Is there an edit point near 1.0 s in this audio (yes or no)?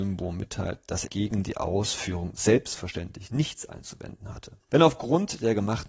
yes